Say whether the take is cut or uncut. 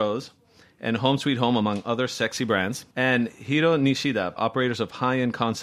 cut